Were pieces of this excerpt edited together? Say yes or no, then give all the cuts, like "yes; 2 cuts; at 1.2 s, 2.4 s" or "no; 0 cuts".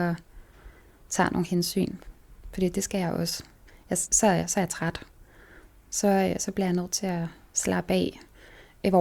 yes; 1 cut; at 4.1 s